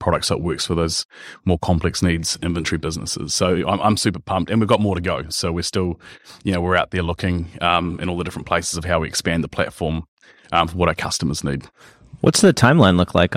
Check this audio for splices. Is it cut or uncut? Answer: uncut